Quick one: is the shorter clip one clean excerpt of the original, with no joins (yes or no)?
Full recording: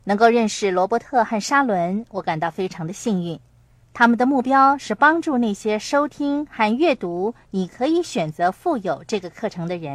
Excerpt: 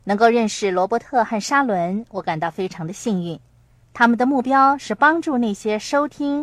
yes